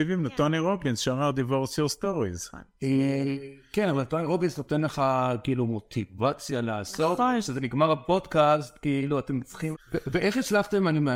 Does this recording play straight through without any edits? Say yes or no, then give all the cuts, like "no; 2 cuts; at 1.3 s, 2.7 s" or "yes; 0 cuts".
no; 1 cut; at 9.7 s